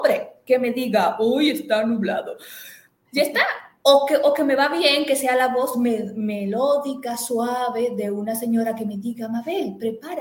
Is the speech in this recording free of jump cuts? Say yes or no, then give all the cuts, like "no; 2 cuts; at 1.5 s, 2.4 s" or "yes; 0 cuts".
yes; 0 cuts